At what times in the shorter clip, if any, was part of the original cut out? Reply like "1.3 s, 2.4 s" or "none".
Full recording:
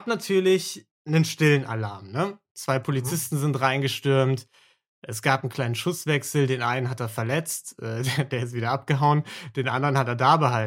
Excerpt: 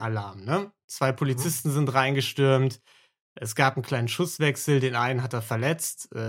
none